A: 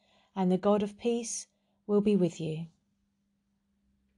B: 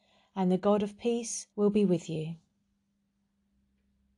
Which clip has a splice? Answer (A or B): B